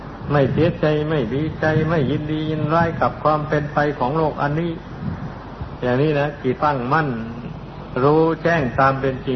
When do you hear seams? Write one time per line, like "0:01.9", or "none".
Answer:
0:06.6